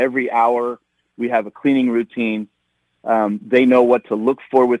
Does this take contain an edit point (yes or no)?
no